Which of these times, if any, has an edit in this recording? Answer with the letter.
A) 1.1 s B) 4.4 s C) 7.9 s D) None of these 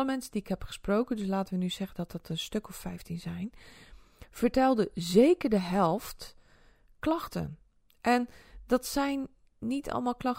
D